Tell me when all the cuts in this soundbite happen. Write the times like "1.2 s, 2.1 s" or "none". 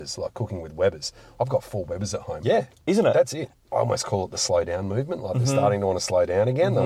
2.4 s, 3.5 s